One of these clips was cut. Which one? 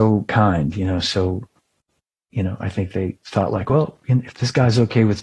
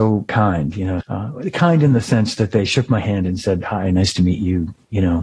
second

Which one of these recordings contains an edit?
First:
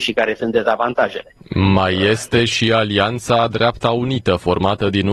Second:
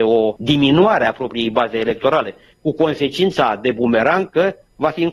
first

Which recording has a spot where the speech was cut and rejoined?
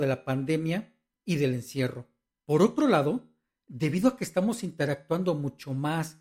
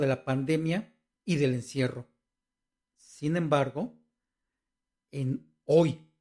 first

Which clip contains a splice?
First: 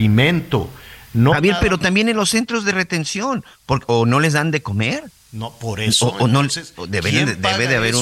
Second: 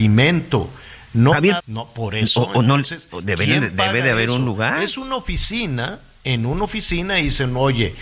second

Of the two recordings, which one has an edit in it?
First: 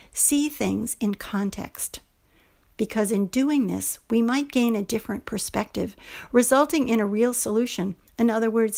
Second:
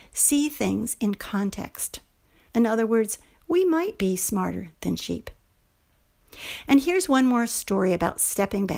second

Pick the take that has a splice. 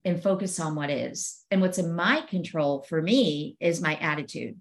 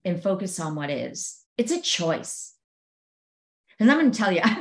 second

